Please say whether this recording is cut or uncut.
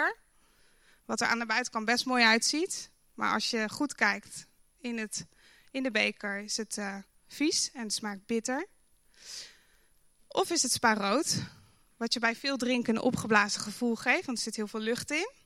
uncut